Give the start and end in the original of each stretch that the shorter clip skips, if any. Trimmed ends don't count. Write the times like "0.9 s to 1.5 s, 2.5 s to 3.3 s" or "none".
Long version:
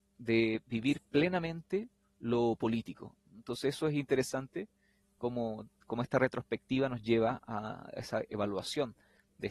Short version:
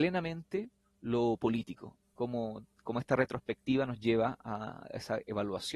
3.2 s to 5.1 s